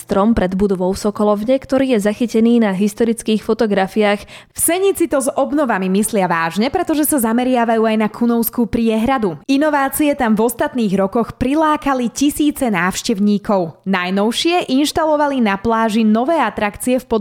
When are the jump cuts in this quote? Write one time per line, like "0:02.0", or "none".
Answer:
0:04.5